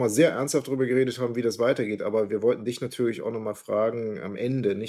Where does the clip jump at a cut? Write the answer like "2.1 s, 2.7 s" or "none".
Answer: none